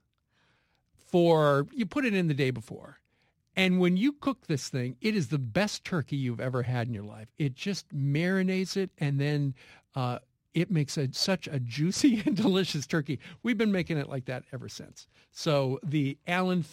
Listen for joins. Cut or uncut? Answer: uncut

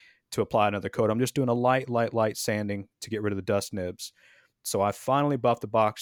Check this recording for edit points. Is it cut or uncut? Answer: cut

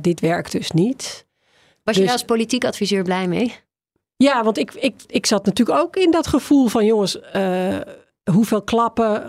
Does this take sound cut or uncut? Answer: uncut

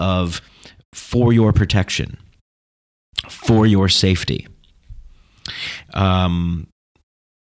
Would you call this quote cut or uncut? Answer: cut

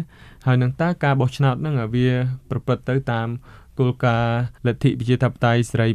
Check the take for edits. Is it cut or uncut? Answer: cut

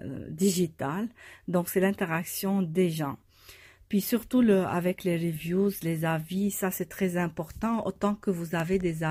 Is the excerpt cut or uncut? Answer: uncut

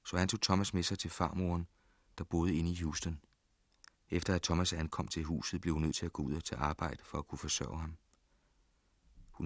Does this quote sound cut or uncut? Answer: cut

